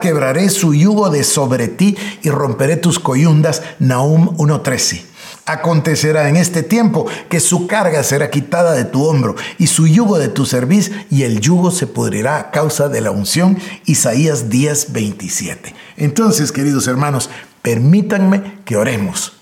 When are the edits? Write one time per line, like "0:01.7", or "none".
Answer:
none